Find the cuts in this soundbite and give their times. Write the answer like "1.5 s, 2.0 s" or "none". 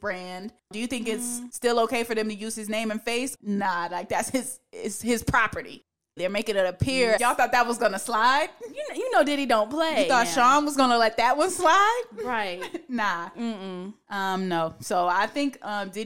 3.4 s, 6.2 s, 7.2 s